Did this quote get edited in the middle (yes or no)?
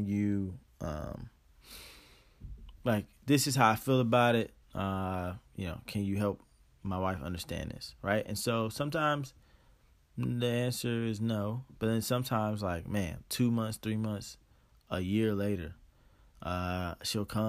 no